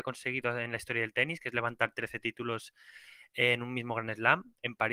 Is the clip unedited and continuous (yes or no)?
yes